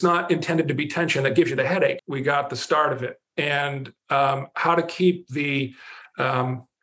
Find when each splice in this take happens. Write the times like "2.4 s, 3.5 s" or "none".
2.0 s